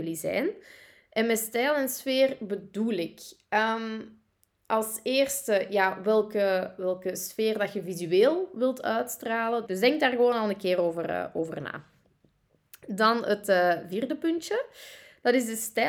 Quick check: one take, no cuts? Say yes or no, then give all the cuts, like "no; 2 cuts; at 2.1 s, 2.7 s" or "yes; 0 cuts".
no; 1 cut; at 9.7 s